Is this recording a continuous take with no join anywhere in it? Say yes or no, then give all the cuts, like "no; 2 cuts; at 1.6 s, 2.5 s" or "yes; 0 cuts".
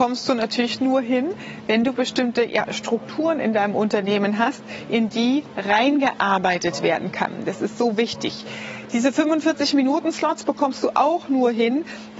yes; 0 cuts